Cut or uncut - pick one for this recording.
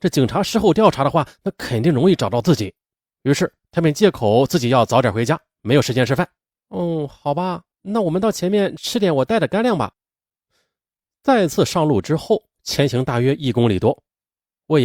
cut